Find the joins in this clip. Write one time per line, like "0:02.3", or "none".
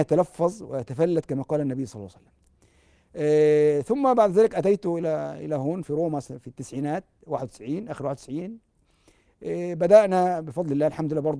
0:05.8